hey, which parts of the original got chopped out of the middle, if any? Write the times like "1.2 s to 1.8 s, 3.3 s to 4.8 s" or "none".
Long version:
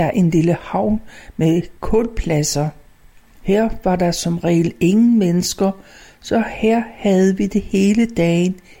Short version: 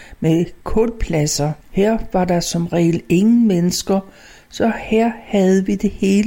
2.8 s to 3.3 s